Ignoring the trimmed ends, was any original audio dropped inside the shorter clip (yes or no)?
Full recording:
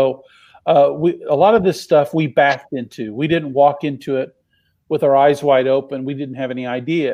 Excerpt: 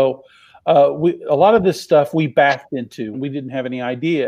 yes